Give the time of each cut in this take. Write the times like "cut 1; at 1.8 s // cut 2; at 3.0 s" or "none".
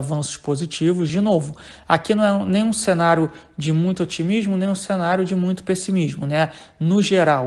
cut 1; at 1.1 s